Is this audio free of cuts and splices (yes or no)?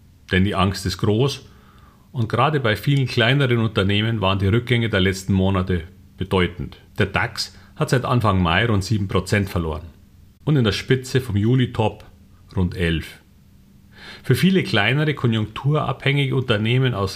no